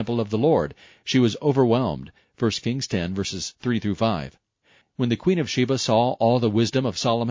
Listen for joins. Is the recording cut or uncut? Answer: cut